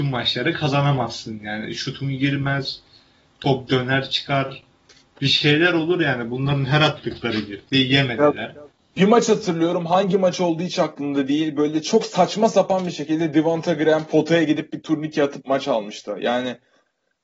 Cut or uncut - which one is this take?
uncut